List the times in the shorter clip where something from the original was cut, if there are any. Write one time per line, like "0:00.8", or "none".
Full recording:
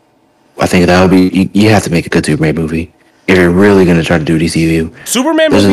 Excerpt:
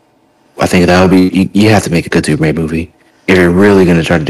none